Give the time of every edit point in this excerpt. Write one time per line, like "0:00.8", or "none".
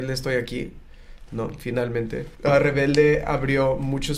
0:02.3